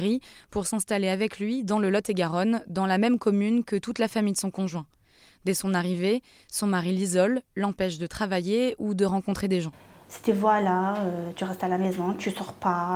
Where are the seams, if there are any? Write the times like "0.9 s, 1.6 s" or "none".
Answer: none